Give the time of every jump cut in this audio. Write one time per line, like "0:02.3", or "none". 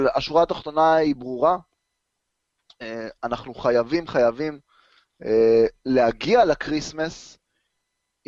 0:04.1